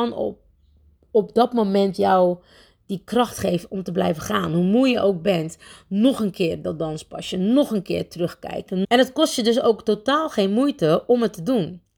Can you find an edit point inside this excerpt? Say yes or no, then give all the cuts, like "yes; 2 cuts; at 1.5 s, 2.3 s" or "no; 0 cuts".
yes; 1 cut; at 8.8 s